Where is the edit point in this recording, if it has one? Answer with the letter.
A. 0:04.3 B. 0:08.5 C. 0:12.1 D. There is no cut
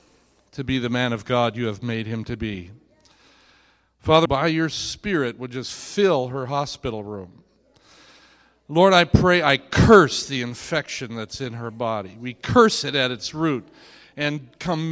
A